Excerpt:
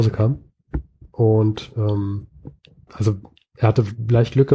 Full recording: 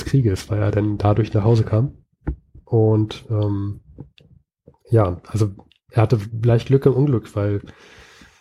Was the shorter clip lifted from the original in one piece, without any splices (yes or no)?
no